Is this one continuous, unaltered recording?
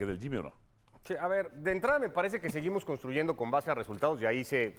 yes; 0 cuts

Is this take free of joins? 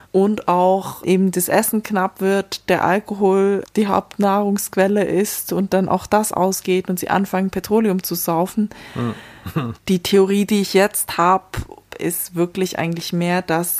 no; 2 cuts; at 9.7 s, 11.9 s

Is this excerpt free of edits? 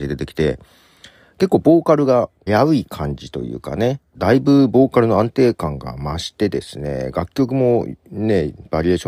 no; 2 cuts; at 2.5 s, 4.1 s

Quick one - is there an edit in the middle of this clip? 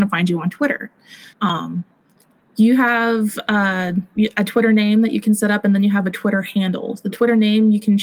yes; 1 cut; at 1.3 s

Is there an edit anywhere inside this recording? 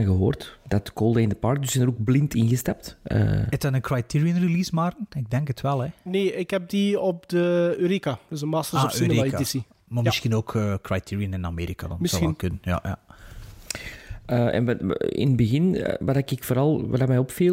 no; 0 cuts

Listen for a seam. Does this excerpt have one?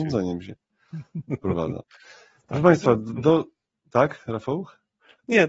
no; 0 cuts

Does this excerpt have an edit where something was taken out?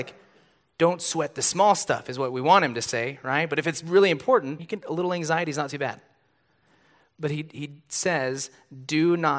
yes; 1 cut; at 4.6 s

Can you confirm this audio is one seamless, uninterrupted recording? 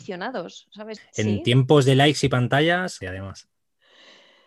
no; 2 cuts; at 1.0 s, 3.0 s

